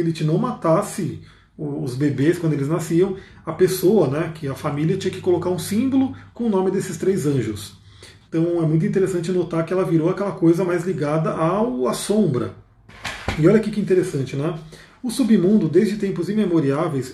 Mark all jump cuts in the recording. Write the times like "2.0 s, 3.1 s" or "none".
8.3 s